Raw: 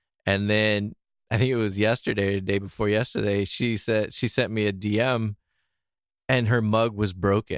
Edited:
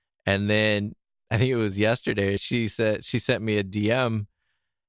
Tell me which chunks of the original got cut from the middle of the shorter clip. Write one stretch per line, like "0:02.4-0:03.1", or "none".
0:02.4-0:03.5